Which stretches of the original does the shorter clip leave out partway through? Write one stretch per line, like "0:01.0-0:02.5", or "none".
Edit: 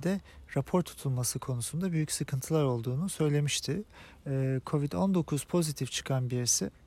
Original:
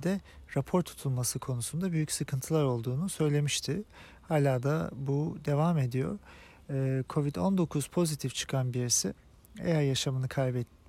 0:04.1-0:06.6